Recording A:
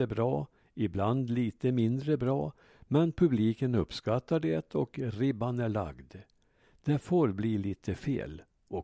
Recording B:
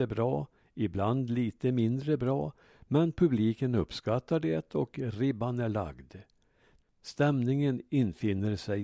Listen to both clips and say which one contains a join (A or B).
B